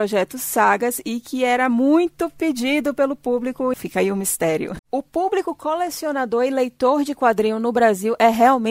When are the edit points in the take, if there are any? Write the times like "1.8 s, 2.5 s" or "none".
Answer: 3.7 s, 4.8 s